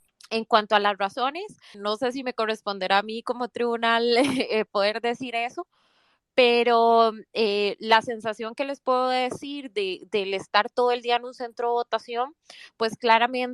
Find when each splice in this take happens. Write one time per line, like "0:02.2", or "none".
0:01.7